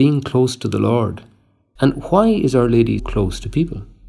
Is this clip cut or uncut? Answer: cut